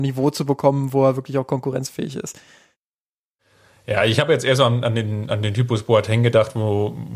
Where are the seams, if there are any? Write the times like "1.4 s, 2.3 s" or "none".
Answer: none